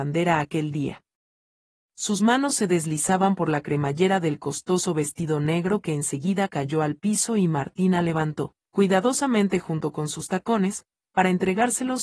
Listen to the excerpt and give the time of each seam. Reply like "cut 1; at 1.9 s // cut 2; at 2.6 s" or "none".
none